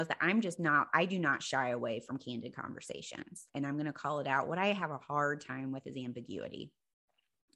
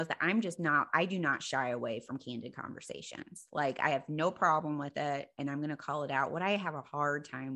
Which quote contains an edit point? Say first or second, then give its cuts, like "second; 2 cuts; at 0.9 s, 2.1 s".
first; 1 cut; at 3.5 s